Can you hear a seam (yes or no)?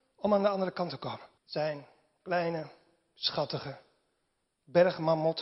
yes